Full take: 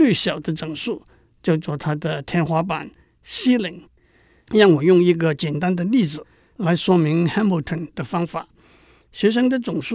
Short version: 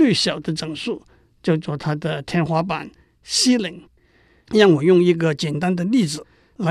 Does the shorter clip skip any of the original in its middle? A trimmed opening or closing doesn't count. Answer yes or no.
no